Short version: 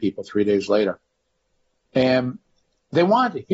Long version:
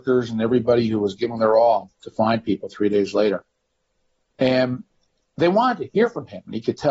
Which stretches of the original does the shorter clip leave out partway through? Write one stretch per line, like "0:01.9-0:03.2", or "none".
none